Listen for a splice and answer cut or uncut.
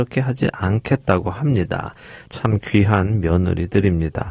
cut